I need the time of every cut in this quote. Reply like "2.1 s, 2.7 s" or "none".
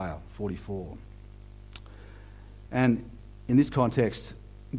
none